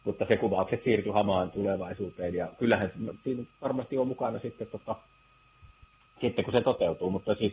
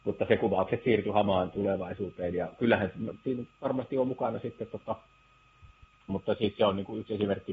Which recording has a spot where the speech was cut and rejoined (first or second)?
second